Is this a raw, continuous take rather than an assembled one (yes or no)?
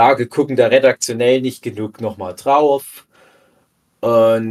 yes